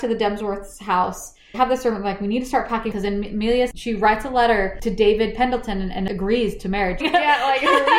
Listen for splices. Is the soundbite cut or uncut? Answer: cut